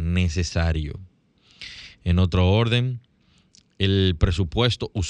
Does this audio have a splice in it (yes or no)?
no